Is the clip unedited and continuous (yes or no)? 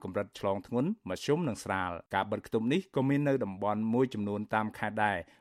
no